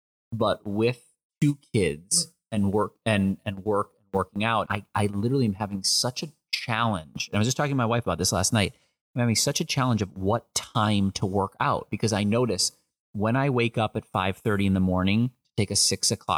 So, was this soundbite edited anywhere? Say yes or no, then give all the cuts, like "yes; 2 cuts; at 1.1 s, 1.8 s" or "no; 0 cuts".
yes; 1 cut; at 4.7 s